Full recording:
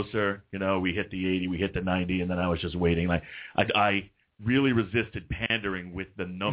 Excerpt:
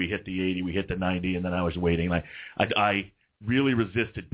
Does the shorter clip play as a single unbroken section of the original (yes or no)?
no